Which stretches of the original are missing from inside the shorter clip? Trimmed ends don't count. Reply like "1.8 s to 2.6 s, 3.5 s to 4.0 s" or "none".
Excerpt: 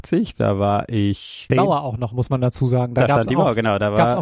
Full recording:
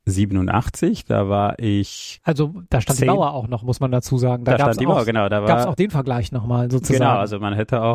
2.2 s to 3.0 s